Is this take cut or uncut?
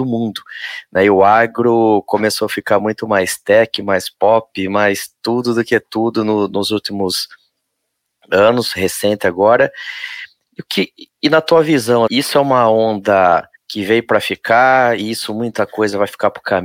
cut